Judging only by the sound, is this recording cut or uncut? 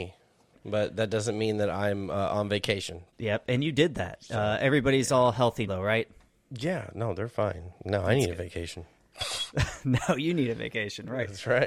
cut